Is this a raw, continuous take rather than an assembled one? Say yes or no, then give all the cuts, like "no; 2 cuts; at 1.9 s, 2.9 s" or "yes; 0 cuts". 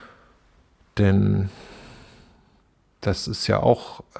yes; 0 cuts